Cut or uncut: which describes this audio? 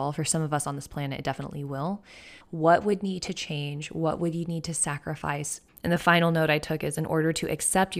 cut